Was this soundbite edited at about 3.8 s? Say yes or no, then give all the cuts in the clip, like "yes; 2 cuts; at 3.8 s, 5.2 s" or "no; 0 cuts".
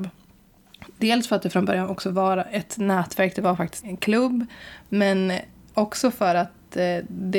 yes; 1 cut; at 3.8 s